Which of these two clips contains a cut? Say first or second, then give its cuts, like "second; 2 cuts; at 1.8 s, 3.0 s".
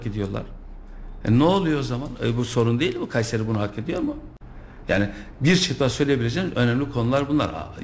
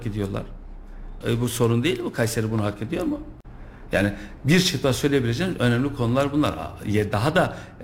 second; 1 cut; at 1.2 s